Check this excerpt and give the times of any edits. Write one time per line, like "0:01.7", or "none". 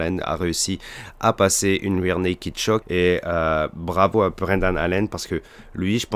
0:02.8